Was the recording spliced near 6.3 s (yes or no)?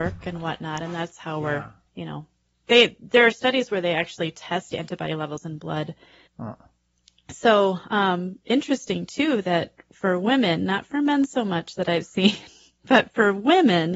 yes